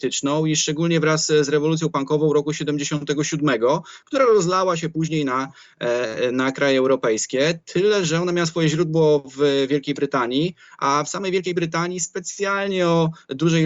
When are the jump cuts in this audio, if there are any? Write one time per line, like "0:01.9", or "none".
none